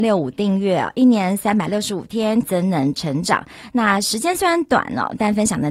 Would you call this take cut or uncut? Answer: cut